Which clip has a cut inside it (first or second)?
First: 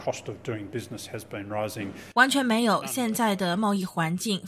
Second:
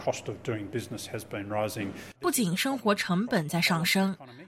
second